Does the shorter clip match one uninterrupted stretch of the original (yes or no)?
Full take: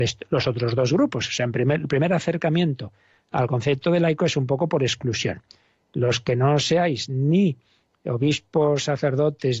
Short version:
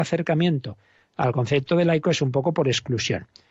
yes